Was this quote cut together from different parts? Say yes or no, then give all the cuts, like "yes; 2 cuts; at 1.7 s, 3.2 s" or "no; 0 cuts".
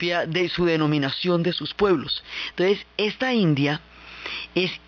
no; 0 cuts